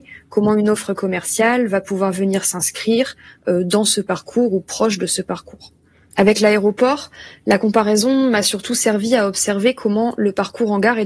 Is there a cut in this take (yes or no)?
yes